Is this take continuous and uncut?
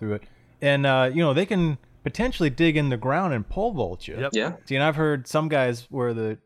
no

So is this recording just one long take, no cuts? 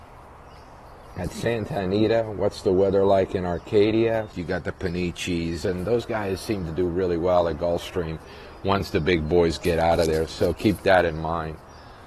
no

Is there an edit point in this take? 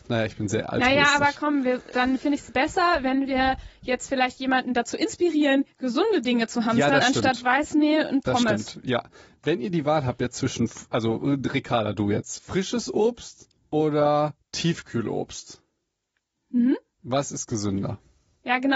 yes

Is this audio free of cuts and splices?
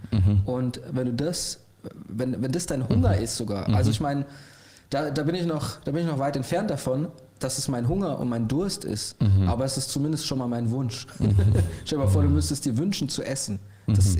yes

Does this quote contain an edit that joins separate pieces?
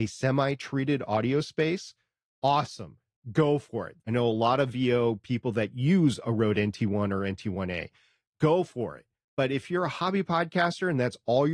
yes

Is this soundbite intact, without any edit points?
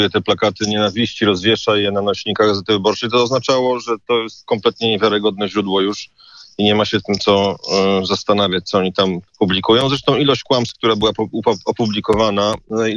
no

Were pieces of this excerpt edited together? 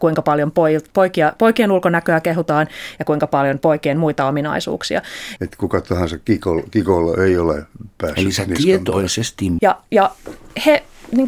yes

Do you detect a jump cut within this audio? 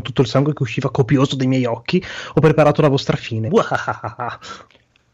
yes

